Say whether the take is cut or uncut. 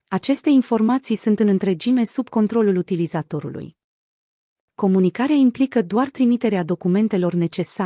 cut